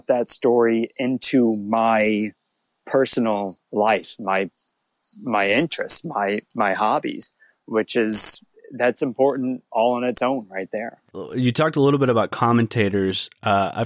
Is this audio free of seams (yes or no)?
yes